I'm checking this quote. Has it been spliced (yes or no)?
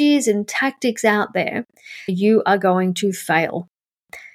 yes